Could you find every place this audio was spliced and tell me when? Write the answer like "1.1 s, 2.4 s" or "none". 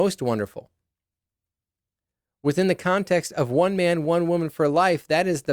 none